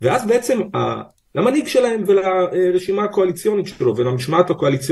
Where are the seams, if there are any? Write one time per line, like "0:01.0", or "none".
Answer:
0:01.3